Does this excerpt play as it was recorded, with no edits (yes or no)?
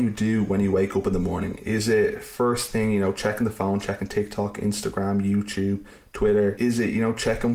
yes